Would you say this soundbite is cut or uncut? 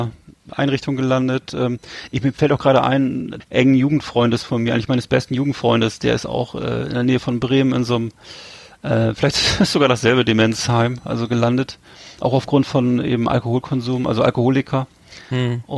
cut